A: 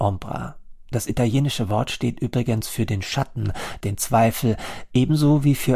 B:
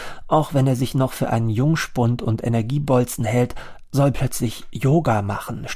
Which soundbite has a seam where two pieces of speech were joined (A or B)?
A